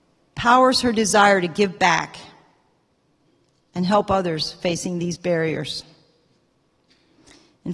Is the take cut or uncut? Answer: uncut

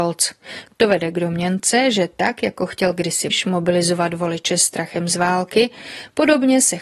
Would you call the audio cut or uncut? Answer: cut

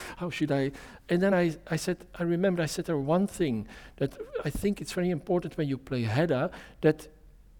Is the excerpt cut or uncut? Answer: uncut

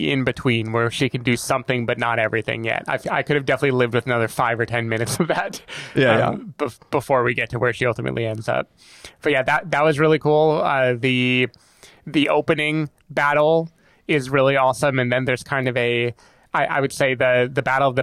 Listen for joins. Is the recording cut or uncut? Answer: uncut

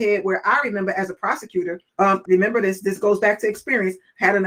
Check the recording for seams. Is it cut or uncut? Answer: cut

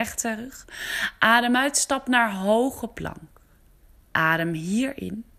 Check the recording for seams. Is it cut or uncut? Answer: uncut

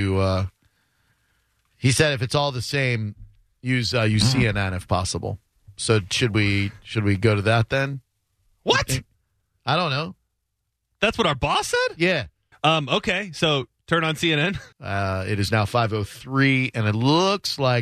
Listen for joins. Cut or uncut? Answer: cut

